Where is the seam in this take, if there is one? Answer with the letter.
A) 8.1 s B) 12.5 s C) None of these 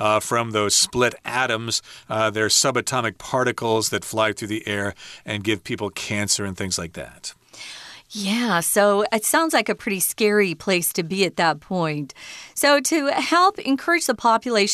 C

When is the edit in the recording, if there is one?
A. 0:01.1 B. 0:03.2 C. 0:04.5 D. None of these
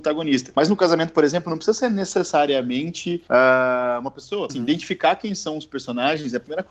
C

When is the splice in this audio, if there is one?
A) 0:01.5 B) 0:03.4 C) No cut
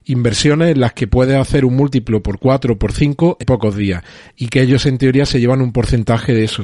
B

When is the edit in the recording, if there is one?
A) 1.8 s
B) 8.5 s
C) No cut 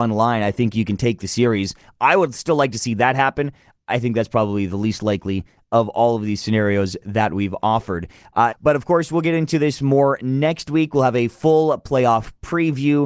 B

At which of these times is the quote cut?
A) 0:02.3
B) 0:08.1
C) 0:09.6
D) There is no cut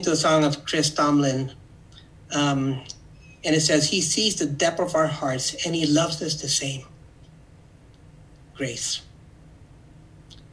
D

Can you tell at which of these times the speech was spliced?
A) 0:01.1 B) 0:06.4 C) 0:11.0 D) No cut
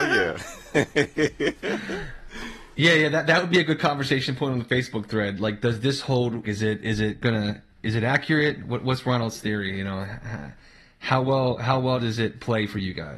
B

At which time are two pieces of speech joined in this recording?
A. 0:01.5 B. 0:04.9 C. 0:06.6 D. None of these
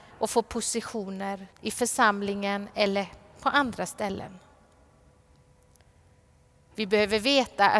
A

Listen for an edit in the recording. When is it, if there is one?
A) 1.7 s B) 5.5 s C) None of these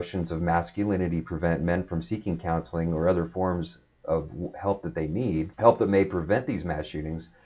B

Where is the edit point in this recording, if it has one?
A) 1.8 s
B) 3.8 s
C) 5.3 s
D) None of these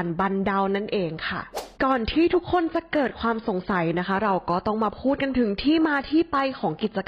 A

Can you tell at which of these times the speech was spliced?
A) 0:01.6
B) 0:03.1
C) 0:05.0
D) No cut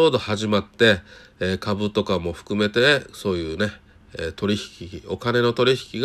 D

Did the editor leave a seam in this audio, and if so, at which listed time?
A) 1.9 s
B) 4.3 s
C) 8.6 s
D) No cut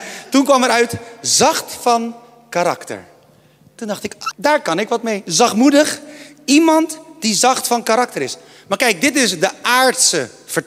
B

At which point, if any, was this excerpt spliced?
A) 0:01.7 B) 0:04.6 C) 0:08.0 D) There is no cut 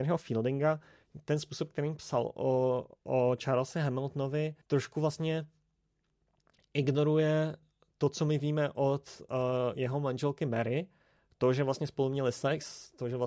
B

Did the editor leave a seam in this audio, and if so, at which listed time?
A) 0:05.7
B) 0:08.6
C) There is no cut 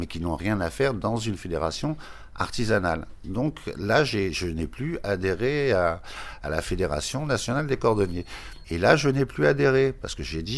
B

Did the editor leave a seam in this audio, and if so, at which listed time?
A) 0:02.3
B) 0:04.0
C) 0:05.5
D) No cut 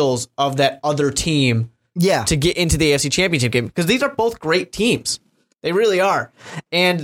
D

